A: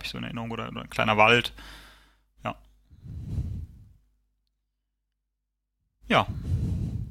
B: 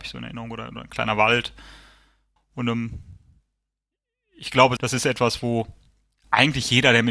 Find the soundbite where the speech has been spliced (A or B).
B